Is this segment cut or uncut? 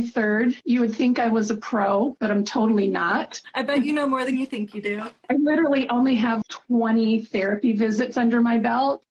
cut